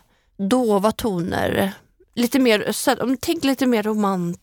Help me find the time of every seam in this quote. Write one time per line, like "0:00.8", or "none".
none